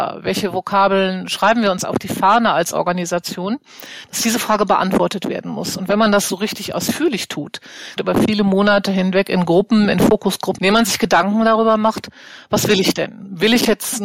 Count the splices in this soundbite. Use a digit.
2